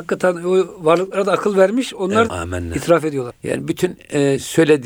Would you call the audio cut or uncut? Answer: cut